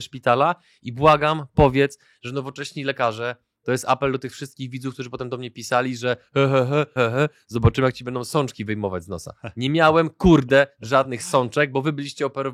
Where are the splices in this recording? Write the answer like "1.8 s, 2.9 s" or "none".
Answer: 7.0 s